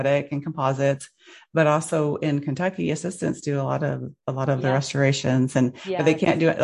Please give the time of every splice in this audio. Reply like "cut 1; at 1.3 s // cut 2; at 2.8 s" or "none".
none